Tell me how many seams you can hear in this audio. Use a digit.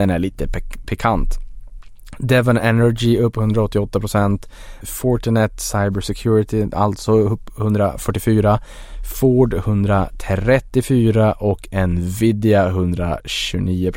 1